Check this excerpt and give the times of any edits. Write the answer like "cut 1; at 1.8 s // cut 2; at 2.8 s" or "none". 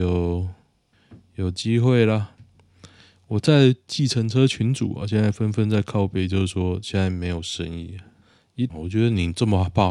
cut 1; at 8.7 s